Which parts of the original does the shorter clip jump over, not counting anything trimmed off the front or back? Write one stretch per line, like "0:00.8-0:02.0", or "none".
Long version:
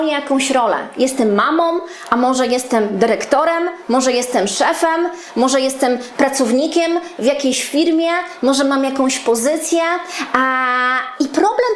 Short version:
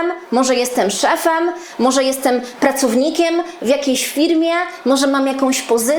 none